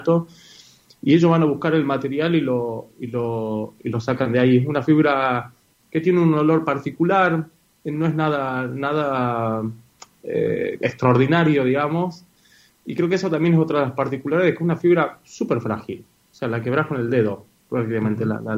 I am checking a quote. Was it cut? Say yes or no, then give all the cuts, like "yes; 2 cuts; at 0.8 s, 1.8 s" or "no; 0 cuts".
no; 0 cuts